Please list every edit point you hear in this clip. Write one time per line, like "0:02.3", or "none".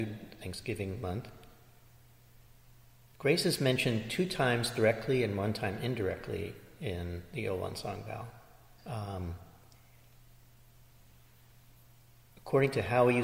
0:08.8